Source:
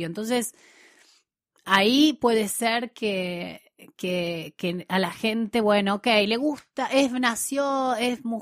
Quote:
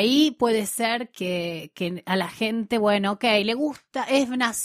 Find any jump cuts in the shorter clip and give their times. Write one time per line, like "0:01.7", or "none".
0:01.1